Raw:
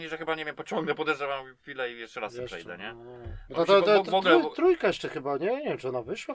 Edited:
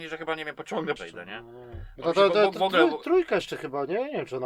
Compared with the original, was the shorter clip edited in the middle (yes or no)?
yes